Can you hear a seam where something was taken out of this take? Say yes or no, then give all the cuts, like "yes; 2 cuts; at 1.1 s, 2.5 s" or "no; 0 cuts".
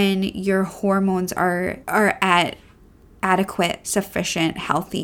yes; 1 cut; at 1.8 s